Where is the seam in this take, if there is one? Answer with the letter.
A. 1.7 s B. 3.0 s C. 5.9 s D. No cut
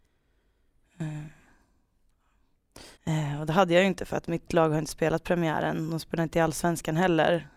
B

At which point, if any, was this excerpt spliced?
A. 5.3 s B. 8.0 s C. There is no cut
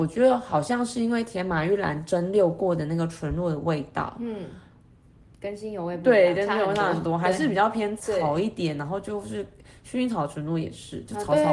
B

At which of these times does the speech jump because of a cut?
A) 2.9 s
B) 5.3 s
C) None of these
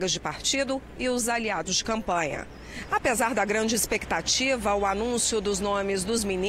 A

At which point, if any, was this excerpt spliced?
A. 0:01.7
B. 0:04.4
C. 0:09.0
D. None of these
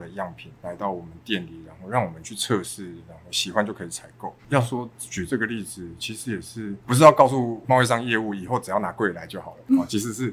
B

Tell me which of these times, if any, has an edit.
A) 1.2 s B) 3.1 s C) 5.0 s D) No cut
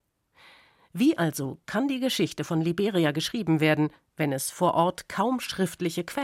D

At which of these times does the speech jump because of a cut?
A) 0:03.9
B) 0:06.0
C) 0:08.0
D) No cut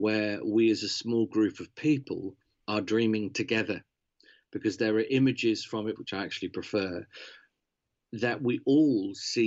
B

